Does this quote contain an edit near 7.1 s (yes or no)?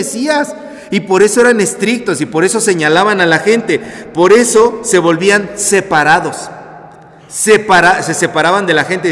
no